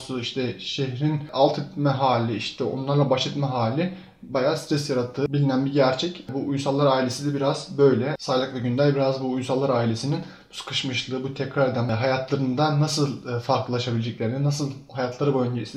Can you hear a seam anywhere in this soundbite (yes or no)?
yes